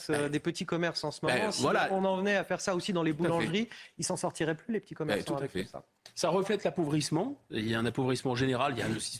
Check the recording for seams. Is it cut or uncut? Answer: uncut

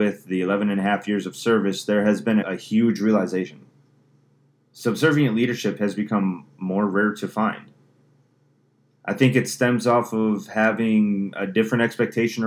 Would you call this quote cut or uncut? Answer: cut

